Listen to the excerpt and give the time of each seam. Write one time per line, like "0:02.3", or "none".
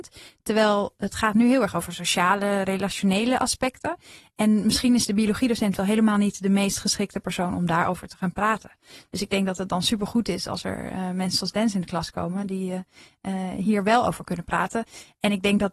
none